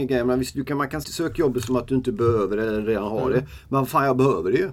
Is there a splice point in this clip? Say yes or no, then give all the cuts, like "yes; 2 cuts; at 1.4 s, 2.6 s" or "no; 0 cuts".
yes; 1 cut; at 1.0 s